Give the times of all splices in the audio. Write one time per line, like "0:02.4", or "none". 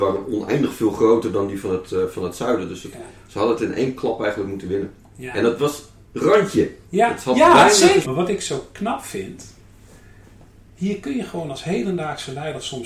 0:06.8
0:08.0